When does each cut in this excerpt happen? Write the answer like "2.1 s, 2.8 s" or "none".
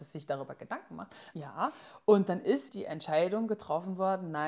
1.3 s, 2.7 s